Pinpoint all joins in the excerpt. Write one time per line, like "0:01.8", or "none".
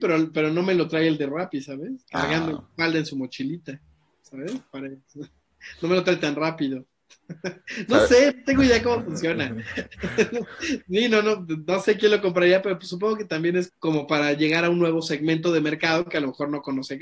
0:13.7